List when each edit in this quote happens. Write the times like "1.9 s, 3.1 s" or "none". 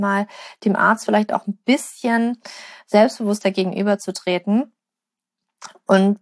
none